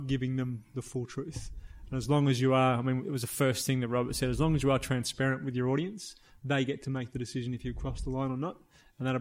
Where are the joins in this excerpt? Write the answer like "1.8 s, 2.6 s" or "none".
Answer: none